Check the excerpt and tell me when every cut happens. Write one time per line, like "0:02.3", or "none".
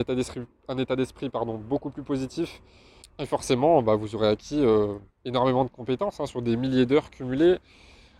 0:03.0